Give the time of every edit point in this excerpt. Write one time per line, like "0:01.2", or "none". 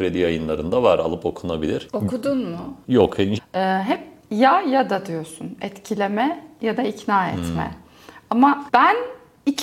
0:03.4

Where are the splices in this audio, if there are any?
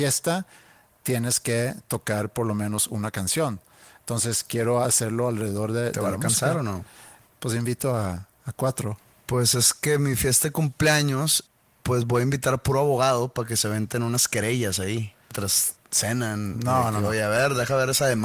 none

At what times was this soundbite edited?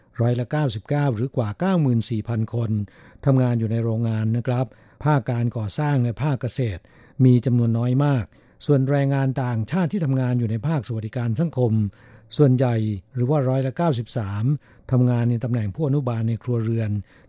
none

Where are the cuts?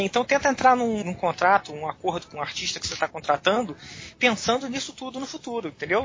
0:01.0
0:04.1

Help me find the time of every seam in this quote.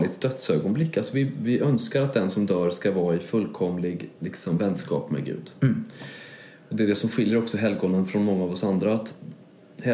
0:04.2

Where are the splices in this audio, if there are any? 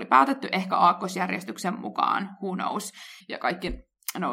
0:03.2

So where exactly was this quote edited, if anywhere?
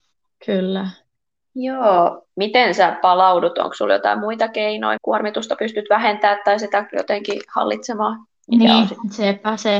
0:05.0
0:08.3

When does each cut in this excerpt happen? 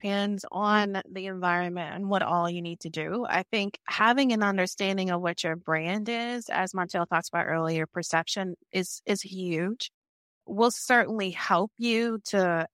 none

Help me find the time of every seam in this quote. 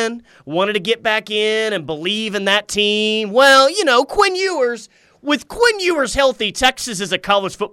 none

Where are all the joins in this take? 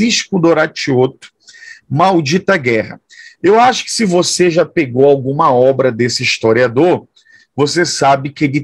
none

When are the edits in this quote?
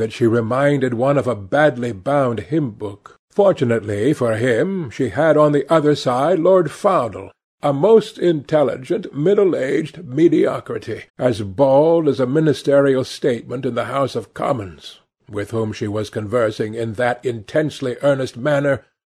0:03.2
0:11.1

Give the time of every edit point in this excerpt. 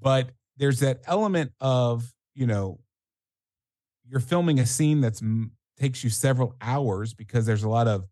none

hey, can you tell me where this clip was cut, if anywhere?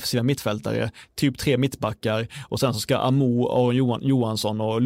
none

